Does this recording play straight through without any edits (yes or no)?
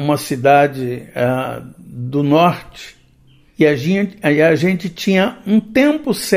yes